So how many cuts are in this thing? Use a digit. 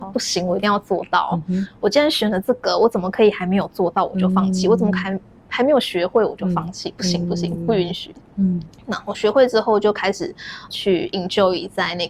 2